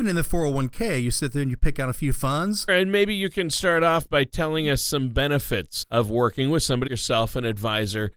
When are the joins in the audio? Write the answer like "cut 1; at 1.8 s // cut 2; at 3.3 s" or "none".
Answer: cut 1; at 2.7 s // cut 2; at 5.8 s // cut 3; at 6.9 s

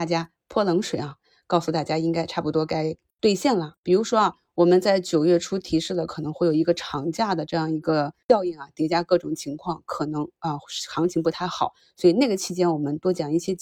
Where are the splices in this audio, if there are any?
cut 1; at 3.7 s

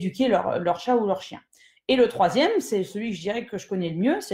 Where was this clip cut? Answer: none

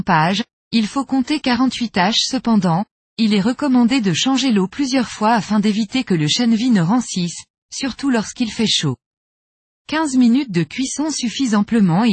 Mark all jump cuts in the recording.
none

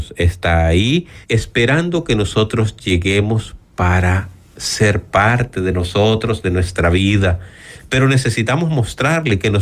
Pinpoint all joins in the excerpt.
cut 1; at 1.2 s

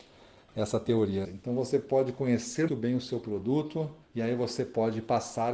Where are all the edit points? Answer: cut 1; at 1.2 s // cut 2; at 2.7 s // cut 3; at 4.0 s

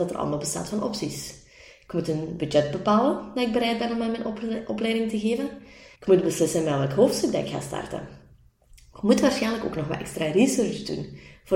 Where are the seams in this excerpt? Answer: cut 1; at 6.0 s

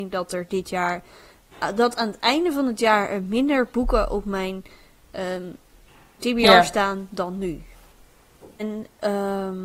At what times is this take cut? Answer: cut 1; at 8.6 s

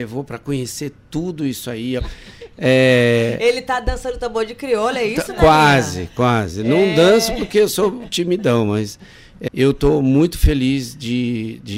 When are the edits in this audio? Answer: cut 1; at 2.0 s // cut 2; at 9.5 s

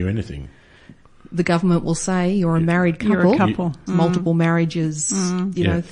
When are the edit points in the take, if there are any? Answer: cut 1; at 3.9 s

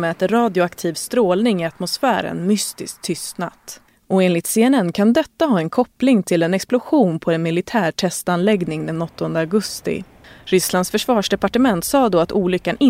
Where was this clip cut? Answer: none

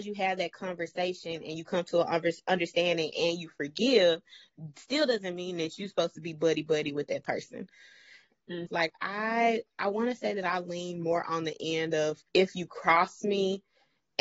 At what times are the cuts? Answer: cut 1; at 8.7 s // cut 2; at 12.3 s

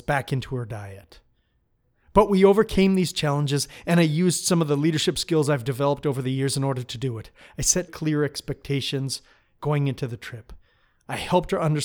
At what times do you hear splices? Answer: cut 1; at 7.9 s

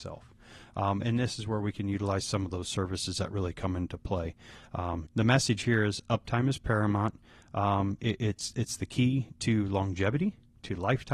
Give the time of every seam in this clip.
cut 1; at 5.1 s

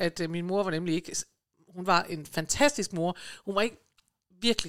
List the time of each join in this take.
none

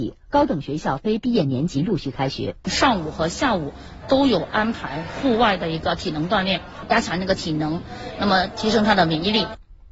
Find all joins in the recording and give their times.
cut 1; at 2.6 s

